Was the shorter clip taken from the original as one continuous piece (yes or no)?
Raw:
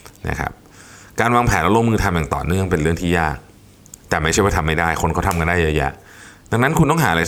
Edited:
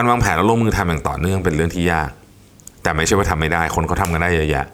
yes